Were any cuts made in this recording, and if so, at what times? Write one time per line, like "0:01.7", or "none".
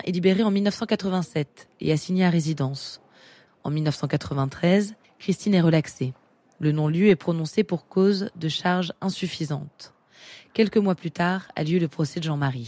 0:03.5
0:05.0